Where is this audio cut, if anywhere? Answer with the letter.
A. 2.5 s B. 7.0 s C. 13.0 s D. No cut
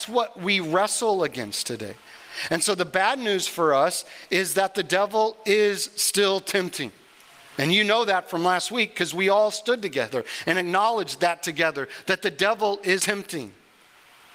C